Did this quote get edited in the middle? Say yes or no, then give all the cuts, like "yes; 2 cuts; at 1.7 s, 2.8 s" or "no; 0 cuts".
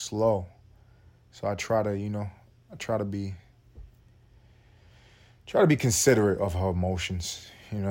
no; 0 cuts